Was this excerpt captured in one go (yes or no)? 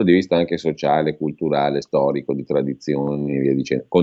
yes